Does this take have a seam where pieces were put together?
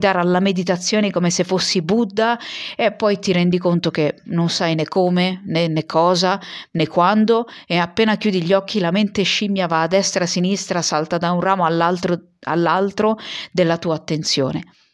no; 0 cuts

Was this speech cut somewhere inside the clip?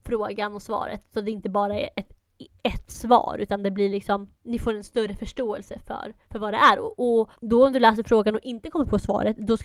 yes; 2 cuts; at 6.2 s, 7.3 s

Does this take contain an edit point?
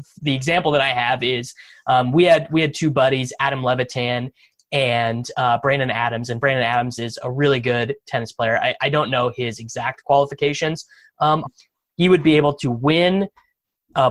yes; 1 cut; at 11.5 s

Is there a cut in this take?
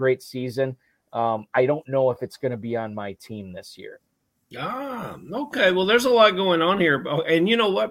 no; 0 cuts

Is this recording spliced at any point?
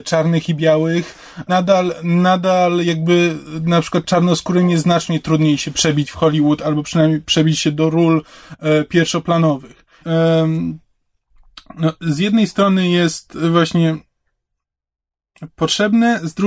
yes; 2 cuts; at 1.5 s, 10.0 s

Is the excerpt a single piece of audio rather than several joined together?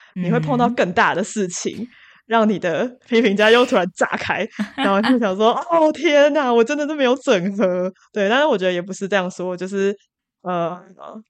yes; 0 cuts

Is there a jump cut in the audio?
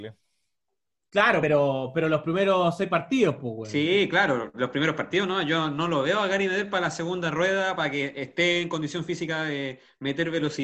no; 0 cuts

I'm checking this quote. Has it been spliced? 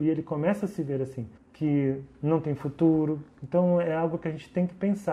yes; 1 cut; at 1.4 s

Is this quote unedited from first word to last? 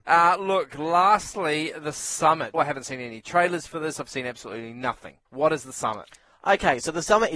no; 2 cuts; at 2.5 s, 5.2 s

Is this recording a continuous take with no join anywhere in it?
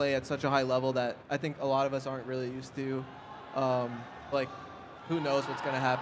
no; 2 cuts; at 1.2 s, 4.3 s

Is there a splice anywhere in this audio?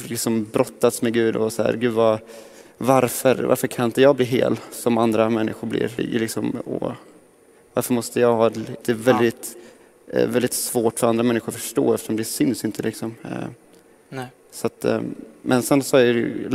yes; 3 cuts; at 3.3 s, 6.0 s, 8.8 s

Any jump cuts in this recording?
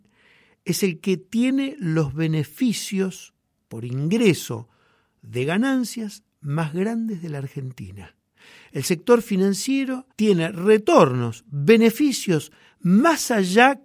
yes; 1 cut; at 10.1 s

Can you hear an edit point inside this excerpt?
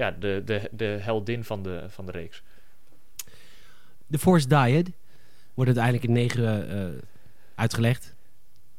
yes; 1 cut; at 4.0 s

